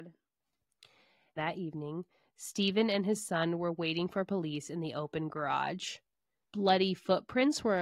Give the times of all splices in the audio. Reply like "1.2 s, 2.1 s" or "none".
1.4 s, 6.4 s